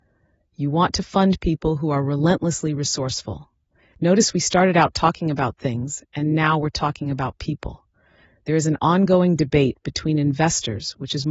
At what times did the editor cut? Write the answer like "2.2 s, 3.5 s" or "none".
none